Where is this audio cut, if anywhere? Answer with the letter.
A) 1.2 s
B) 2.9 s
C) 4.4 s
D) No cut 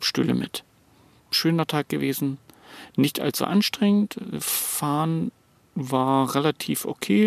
A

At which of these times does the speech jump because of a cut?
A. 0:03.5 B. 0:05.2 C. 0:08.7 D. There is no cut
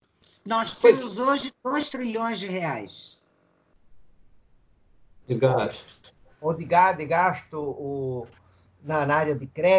B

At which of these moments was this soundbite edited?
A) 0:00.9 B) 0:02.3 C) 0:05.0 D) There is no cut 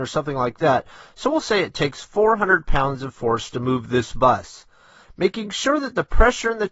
C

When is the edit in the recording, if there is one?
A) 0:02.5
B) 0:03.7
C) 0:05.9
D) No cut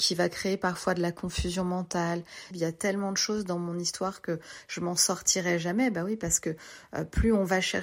A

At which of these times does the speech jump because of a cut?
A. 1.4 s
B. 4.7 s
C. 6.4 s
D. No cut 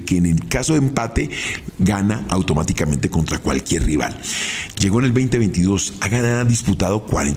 B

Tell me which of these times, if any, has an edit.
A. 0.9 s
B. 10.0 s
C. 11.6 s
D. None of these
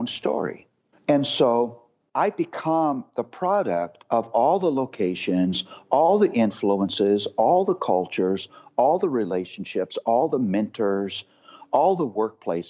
A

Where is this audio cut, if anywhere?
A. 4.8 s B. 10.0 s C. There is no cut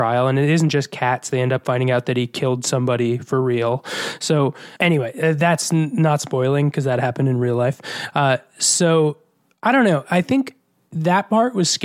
A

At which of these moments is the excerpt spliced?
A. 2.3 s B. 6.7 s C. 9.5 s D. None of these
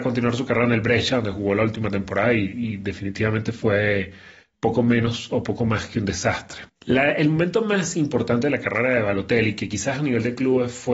B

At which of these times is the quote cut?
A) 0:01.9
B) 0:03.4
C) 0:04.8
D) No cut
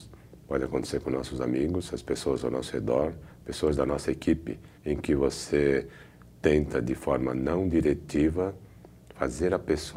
C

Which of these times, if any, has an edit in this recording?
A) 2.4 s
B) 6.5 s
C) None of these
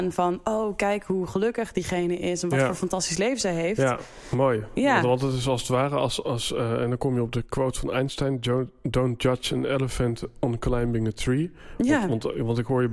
C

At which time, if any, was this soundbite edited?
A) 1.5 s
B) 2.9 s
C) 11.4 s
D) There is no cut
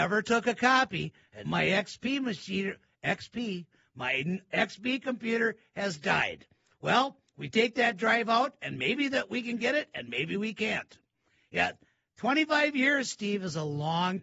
A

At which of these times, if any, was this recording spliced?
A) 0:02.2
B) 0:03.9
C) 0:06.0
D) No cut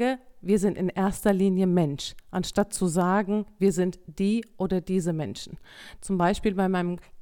C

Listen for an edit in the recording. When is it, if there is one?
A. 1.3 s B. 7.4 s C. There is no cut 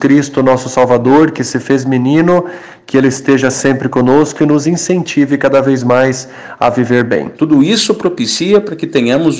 B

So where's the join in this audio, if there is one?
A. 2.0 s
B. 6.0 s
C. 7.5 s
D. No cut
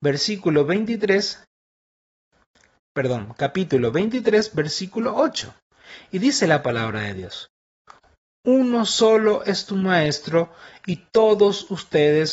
D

